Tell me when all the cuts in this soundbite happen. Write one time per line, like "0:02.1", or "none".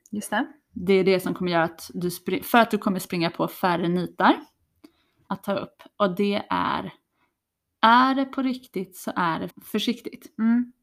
0:05.3
0:09.5